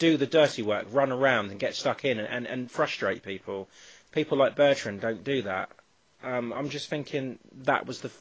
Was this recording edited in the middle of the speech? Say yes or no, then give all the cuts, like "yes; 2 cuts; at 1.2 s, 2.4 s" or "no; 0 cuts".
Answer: yes; 1 cut; at 6.6 s